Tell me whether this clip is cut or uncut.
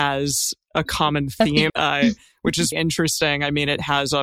cut